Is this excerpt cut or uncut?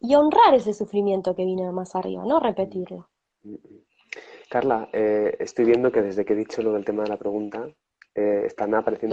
uncut